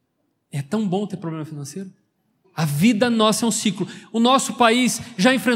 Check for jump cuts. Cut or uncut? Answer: cut